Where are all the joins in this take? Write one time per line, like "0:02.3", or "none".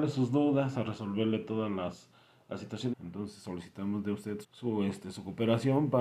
0:02.9
0:04.4